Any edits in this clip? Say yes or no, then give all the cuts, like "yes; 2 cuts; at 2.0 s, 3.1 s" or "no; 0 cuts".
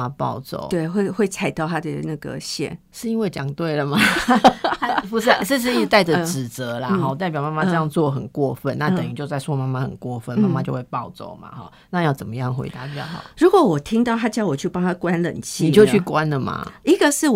no; 0 cuts